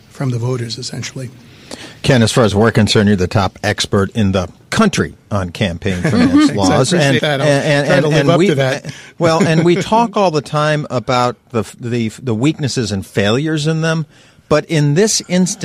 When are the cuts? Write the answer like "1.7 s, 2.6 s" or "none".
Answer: 7.2 s

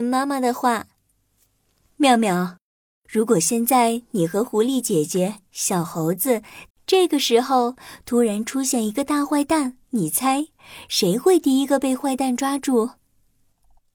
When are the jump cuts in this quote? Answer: 6.7 s, 9.8 s

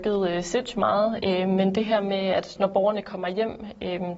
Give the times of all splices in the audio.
1.2 s

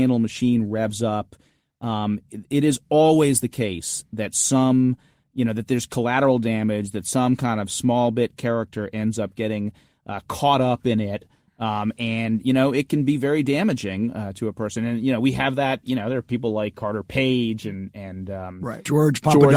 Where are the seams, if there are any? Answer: none

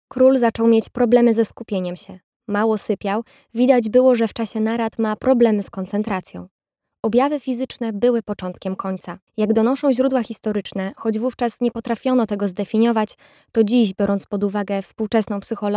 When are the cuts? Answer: 9.3 s

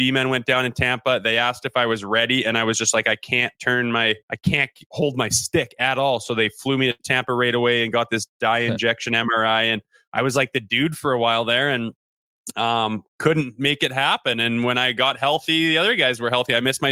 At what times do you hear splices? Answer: 4.2 s

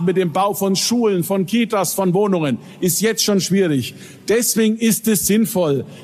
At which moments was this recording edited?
none

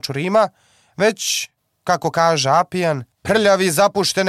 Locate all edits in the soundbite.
3.1 s

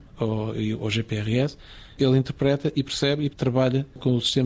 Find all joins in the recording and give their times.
2.0 s, 3.3 s

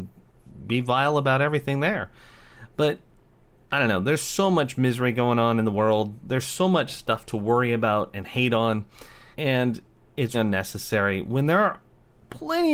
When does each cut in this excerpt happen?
9.3 s, 10.3 s

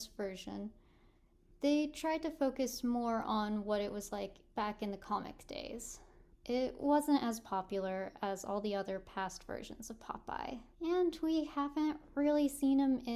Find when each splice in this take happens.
6.3 s, 10.7 s

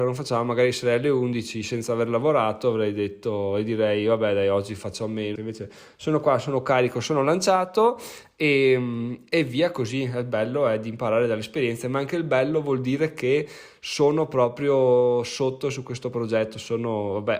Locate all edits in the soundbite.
5.4 s

